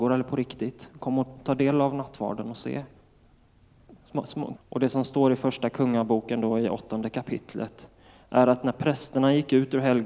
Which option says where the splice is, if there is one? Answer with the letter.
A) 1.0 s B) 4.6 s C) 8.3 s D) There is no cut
B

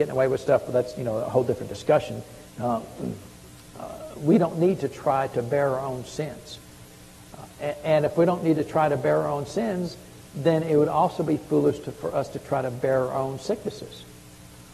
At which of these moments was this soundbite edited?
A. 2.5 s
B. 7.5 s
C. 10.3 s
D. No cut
A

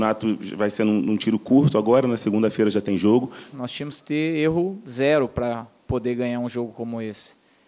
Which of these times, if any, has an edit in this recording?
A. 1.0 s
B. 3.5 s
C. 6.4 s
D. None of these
B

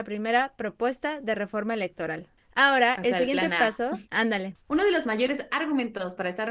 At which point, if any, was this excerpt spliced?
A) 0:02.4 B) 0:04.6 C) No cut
B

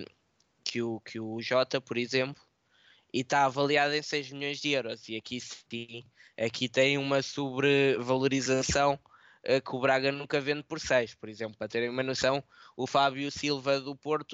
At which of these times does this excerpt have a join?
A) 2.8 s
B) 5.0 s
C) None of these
C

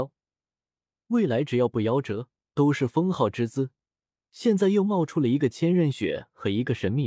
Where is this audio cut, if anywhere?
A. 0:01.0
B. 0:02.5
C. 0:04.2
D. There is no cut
B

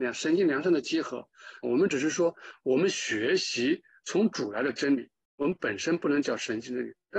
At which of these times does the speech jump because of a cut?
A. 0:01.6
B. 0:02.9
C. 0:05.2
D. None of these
A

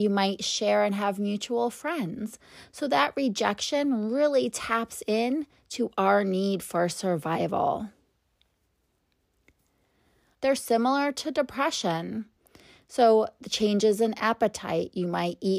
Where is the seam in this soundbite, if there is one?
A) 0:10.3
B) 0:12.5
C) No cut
A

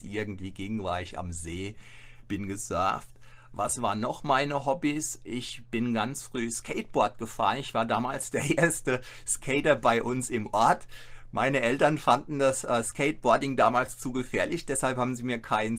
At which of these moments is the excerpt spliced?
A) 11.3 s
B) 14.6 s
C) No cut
C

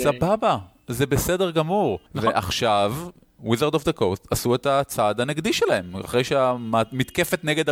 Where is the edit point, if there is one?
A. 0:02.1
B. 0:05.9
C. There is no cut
A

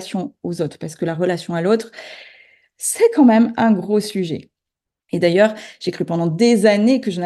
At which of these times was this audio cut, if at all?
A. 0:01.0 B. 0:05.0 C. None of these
B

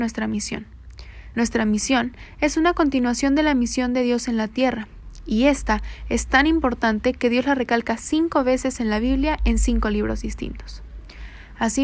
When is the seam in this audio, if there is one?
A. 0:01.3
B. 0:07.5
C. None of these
A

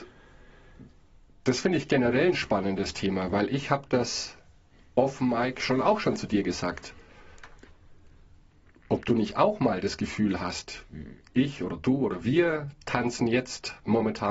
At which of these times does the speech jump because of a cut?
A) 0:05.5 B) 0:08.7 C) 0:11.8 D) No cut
D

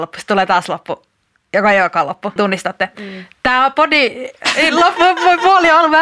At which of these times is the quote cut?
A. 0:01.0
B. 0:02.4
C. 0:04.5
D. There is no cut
B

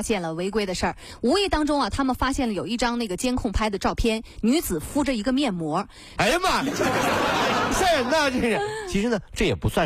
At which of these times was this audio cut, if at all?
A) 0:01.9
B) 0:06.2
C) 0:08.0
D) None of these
B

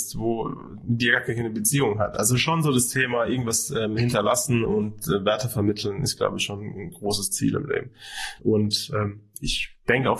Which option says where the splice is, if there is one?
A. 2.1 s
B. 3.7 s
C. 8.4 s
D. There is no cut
C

